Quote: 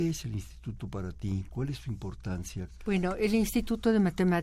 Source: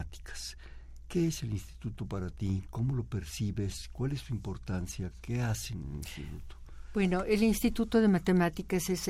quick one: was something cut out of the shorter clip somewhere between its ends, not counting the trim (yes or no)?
yes